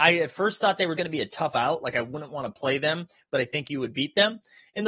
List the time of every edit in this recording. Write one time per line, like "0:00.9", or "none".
0:01.0